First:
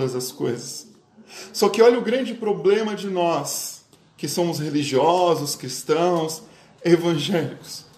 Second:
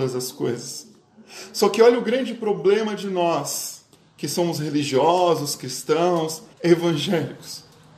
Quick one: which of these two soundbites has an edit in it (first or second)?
second